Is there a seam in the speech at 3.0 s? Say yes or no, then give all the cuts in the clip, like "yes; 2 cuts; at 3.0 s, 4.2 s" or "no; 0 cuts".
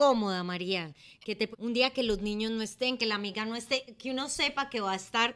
yes; 2 cuts; at 1.5 s, 3.0 s